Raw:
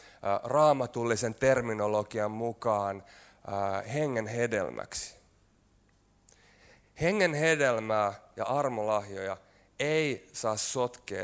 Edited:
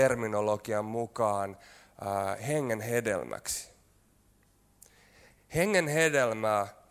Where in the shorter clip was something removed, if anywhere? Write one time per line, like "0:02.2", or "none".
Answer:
none